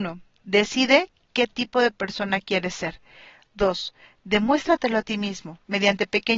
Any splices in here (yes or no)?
no